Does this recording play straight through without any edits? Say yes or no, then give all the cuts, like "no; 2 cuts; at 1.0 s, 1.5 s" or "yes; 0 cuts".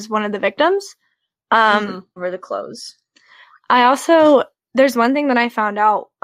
no; 1 cut; at 2.2 s